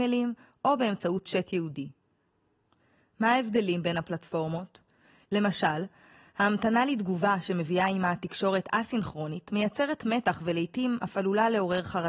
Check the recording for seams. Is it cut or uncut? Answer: cut